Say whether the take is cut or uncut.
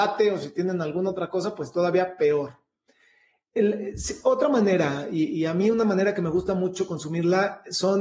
uncut